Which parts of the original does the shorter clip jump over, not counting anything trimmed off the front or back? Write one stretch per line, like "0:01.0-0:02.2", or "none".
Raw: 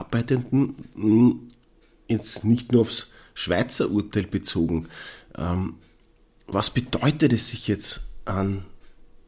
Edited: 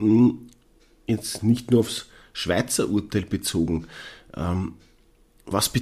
none